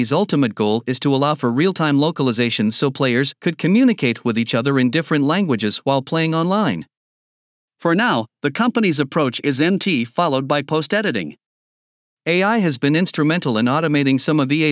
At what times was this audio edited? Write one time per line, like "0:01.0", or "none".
none